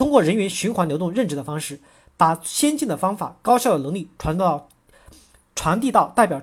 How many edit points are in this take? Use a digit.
0